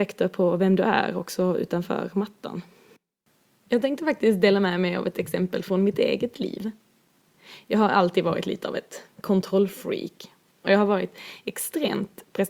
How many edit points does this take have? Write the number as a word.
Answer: zero